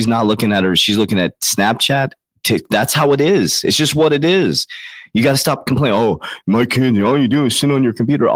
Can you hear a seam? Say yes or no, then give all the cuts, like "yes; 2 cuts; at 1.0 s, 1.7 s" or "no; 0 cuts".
no; 0 cuts